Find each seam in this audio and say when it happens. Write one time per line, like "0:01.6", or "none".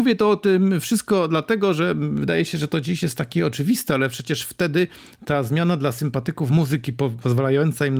none

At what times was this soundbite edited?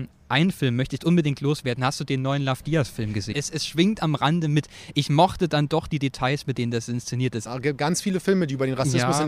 0:03.3
0:07.5

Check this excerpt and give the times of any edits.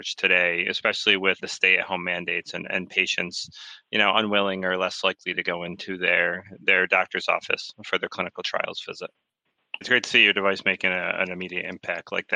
0:01.4
0:09.8

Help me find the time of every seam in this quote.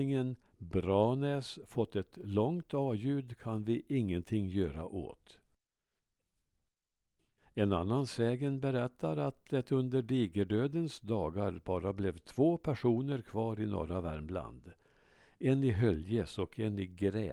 0:07.4

